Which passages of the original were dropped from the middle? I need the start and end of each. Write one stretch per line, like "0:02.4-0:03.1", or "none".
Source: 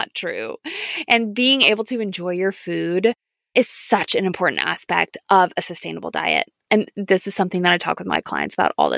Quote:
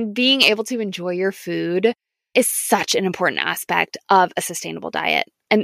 none